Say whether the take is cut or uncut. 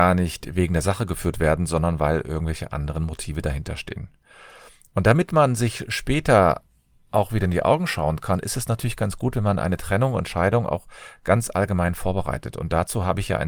uncut